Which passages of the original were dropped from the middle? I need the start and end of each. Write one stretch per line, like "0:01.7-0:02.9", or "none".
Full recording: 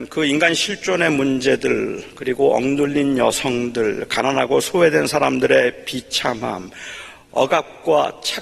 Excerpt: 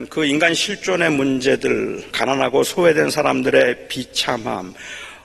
0:02.1-0:04.1